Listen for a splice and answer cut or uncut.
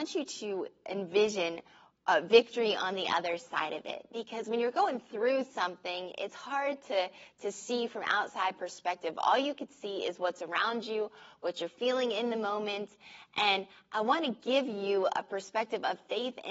uncut